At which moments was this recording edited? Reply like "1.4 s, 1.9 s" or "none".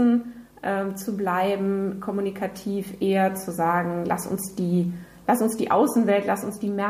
none